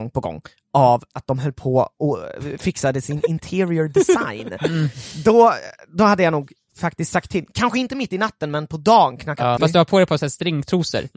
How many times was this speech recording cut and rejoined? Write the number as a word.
one